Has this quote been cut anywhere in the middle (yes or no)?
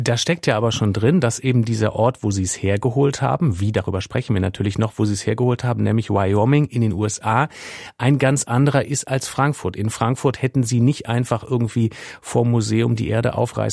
no